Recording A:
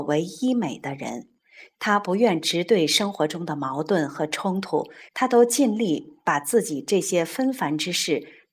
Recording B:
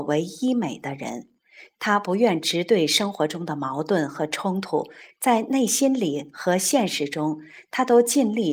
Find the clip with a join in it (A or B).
A